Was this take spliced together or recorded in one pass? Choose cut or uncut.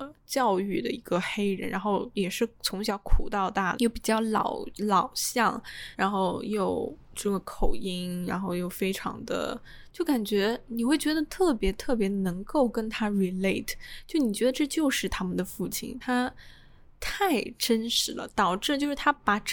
cut